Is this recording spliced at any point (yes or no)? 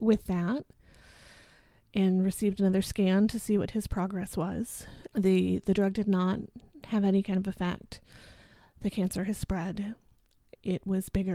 yes